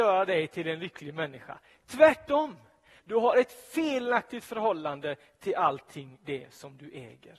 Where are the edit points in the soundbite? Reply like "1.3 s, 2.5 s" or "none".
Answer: 3.0 s